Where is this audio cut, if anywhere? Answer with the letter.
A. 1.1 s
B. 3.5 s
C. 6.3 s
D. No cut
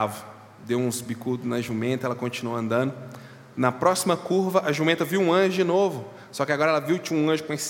D